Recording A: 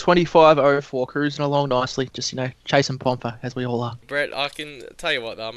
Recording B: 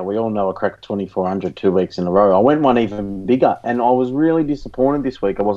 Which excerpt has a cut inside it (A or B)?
A